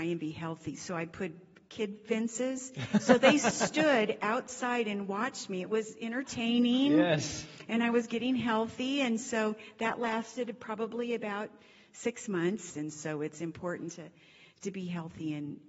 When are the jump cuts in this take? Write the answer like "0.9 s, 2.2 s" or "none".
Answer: 12.7 s